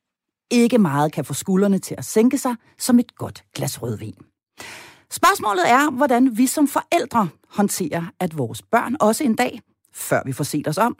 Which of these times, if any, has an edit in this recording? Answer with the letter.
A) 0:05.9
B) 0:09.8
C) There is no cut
C